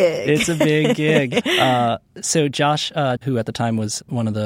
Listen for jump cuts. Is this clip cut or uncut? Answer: cut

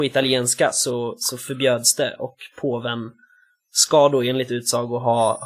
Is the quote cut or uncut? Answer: uncut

